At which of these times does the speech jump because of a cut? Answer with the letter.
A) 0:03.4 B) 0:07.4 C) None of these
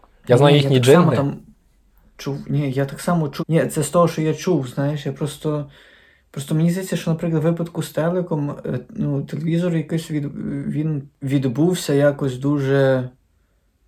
A